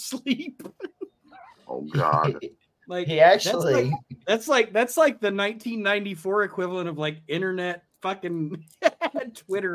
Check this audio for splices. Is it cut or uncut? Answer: uncut